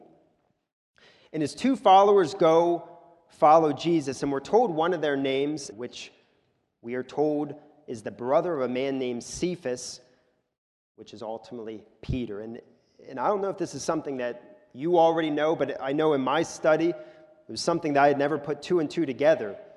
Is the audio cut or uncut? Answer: cut